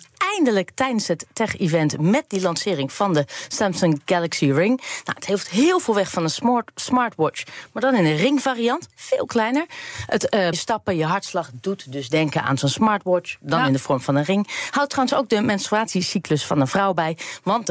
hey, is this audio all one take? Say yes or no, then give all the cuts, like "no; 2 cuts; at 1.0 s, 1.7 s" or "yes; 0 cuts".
no; 1 cut; at 10.5 s